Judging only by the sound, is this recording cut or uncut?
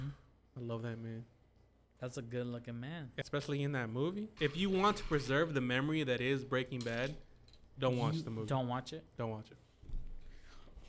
cut